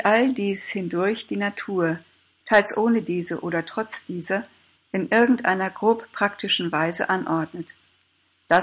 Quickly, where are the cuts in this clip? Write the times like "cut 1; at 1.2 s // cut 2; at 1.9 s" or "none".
cut 1; at 2.4 s